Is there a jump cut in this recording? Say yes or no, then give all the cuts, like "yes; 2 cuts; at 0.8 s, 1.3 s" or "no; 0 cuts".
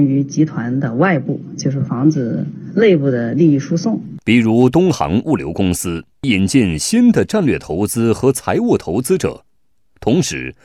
no; 0 cuts